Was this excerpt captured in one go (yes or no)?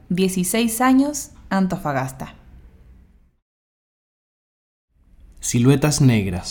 yes